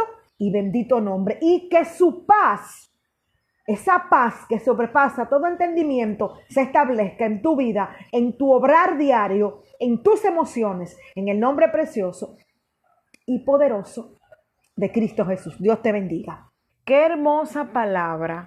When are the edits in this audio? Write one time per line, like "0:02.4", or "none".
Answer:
0:08.1
0:16.7